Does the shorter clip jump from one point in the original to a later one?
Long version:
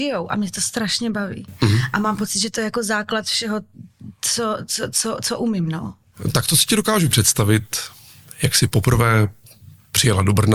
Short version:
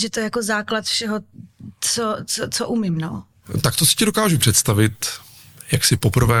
yes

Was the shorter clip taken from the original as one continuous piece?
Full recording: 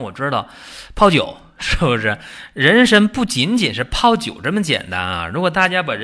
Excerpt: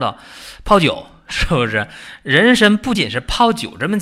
no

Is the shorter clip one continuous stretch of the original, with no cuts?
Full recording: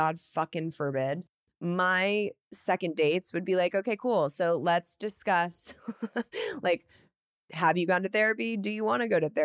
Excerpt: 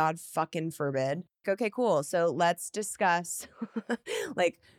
no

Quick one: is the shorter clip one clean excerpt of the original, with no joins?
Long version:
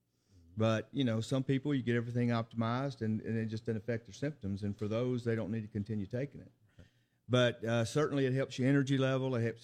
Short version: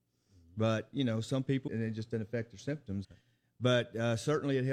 no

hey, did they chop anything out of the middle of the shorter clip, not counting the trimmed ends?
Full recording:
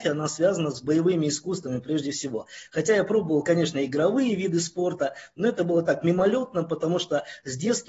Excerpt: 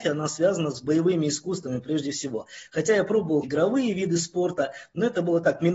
yes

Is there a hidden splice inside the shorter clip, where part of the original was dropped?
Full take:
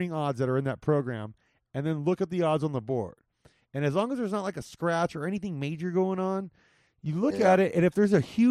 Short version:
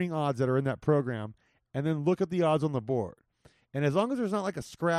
no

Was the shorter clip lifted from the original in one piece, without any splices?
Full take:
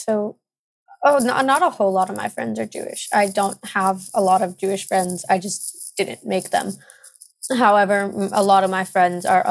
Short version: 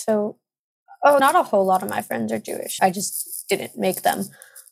no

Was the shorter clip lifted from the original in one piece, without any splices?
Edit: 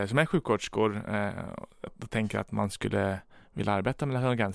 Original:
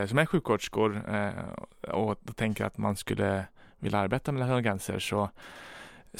no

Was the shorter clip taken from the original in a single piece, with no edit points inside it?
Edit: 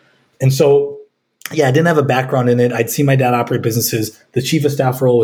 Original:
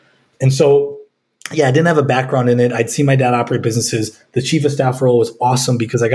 yes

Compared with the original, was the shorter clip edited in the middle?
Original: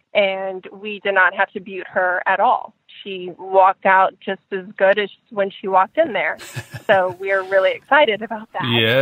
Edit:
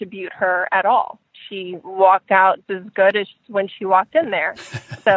yes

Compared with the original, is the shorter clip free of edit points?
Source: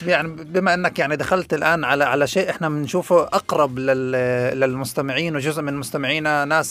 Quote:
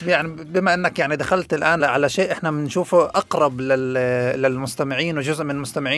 no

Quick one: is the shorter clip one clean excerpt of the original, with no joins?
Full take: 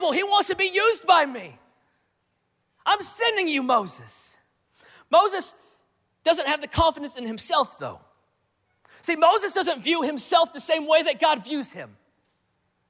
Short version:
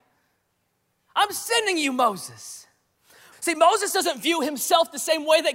no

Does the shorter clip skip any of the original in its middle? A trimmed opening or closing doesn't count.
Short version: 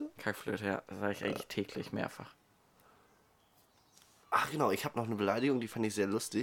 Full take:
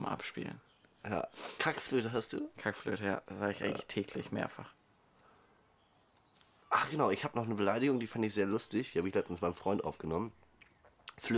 no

